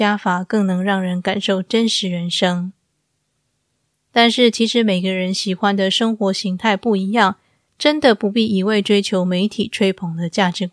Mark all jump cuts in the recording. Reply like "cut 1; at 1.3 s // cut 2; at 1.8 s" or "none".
cut 1; at 3.9 s